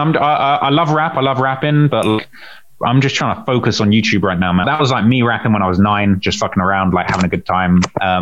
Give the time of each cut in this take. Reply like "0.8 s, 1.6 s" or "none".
4.6 s